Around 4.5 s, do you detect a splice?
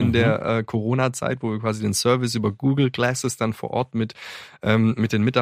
no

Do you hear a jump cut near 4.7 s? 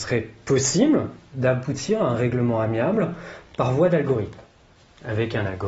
no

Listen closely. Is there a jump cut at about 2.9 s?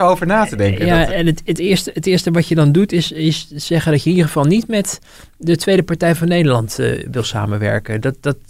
no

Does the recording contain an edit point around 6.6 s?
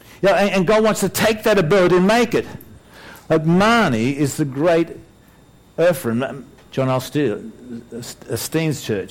yes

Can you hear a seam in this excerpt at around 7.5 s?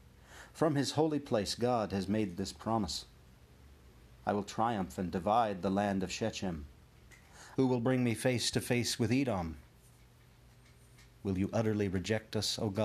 yes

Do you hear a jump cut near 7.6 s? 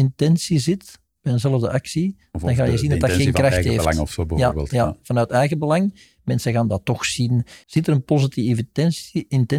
yes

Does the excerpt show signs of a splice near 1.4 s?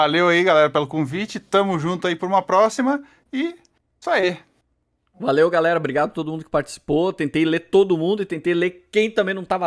no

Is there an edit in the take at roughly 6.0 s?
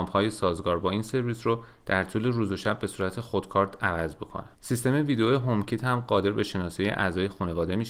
no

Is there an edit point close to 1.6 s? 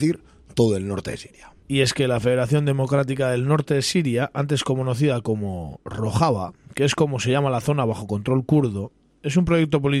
yes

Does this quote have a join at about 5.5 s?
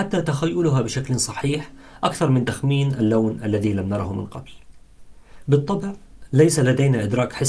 yes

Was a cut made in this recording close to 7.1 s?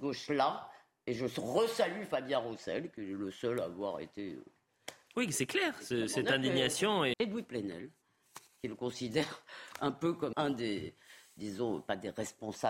yes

